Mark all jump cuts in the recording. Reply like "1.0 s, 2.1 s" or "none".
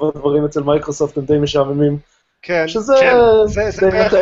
none